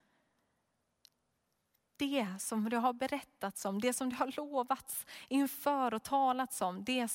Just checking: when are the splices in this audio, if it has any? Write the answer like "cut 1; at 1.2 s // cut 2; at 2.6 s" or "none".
none